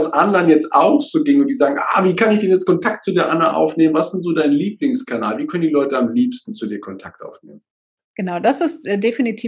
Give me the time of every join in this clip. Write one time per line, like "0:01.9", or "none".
none

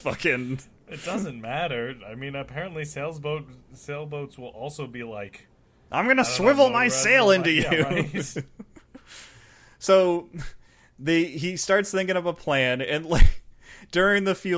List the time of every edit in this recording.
none

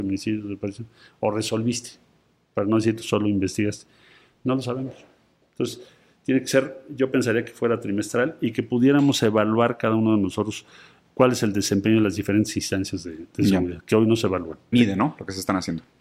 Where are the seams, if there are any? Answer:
0:14.7

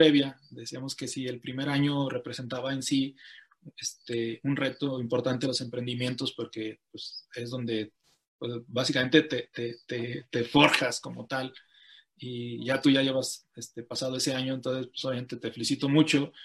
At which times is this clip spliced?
none

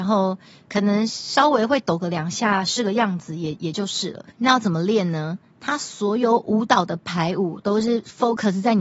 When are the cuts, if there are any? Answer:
0:04.3

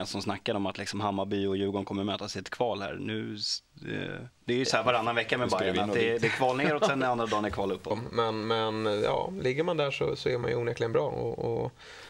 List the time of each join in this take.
0:07.9

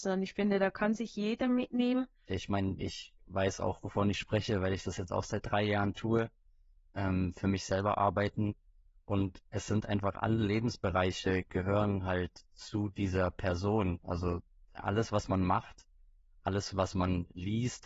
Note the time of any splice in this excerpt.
0:02.3

